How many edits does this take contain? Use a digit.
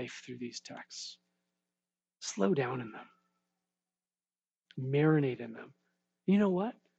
0